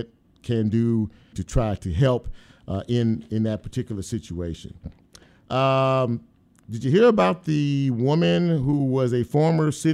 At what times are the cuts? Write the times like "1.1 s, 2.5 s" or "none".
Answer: 1.3 s